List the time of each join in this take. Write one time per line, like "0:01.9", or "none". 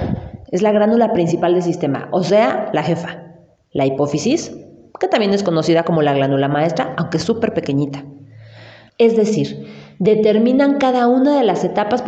0:08.9